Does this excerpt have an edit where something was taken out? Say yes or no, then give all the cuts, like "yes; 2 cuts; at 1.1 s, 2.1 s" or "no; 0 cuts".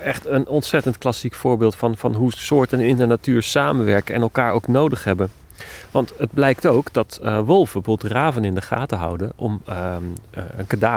no; 0 cuts